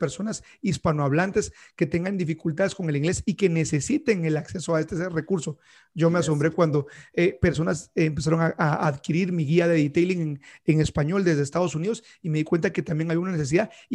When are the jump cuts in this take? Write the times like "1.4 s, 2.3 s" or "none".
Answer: none